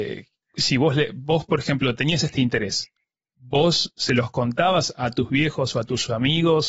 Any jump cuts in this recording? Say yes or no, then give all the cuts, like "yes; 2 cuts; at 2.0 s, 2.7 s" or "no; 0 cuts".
no; 0 cuts